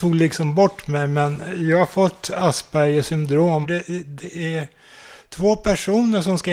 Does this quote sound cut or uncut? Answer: cut